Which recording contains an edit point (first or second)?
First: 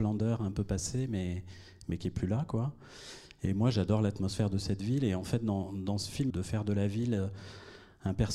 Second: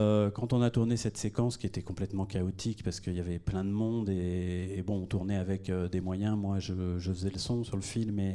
first